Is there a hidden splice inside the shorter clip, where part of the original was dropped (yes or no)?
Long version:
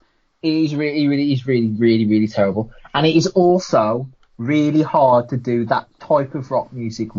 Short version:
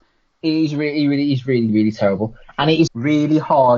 yes